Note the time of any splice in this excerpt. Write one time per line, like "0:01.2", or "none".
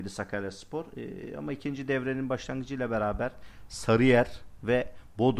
none